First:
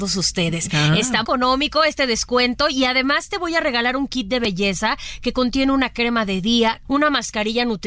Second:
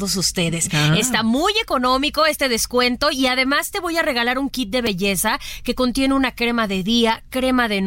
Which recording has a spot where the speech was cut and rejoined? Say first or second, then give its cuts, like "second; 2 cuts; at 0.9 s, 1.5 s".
first; 2 cuts; at 1.2 s, 6.8 s